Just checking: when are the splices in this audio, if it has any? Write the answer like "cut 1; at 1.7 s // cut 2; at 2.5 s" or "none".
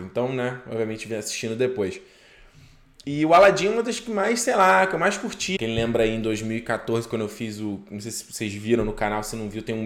cut 1; at 5.6 s